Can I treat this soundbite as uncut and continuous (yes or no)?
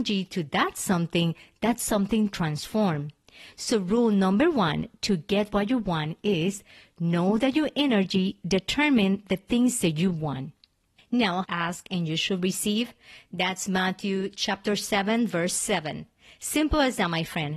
no